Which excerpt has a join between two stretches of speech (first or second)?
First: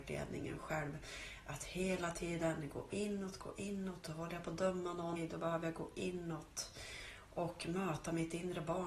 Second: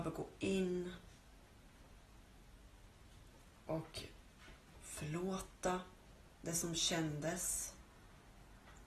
first